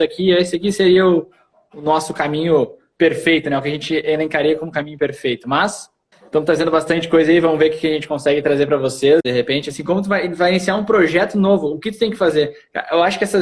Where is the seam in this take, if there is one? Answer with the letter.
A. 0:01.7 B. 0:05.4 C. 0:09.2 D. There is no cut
C